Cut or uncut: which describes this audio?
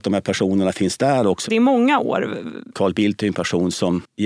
cut